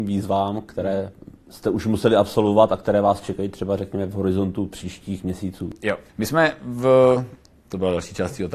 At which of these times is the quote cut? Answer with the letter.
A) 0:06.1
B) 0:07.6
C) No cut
A